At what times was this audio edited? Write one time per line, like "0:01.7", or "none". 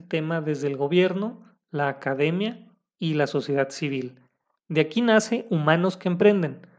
0:04.6